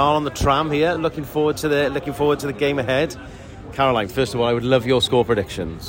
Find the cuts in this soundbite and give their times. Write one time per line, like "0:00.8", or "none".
none